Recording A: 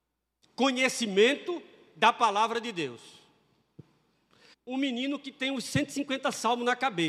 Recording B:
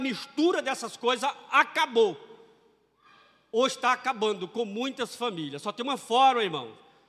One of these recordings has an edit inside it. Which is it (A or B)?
A